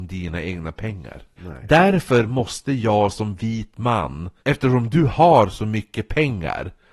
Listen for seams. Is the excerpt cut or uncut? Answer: cut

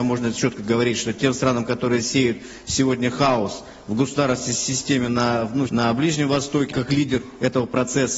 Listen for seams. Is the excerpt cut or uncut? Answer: cut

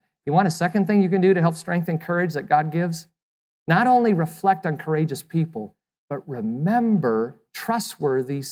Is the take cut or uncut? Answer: uncut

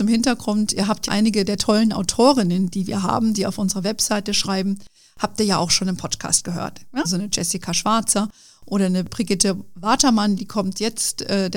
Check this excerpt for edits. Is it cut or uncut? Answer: cut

